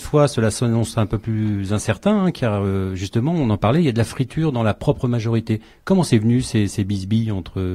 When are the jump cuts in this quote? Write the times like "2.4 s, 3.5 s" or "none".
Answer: none